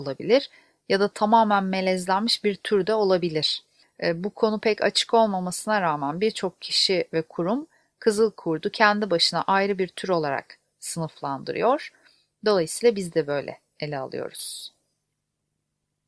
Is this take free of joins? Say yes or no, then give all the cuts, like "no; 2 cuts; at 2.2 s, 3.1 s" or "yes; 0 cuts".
yes; 0 cuts